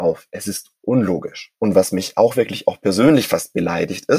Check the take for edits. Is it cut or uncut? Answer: uncut